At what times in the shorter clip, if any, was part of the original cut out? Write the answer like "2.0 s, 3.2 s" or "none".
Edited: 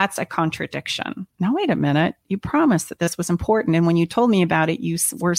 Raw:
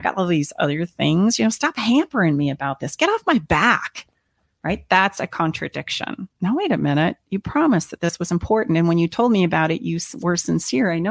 none